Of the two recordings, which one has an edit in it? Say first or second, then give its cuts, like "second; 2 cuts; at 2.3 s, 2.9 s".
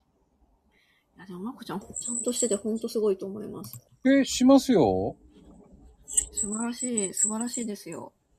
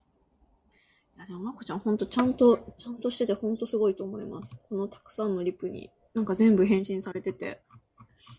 first; 2 cuts; at 1.8 s, 3.9 s